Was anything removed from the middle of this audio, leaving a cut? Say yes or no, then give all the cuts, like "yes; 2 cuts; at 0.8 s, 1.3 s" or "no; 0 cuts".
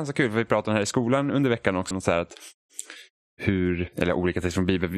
yes; 1 cut; at 1.9 s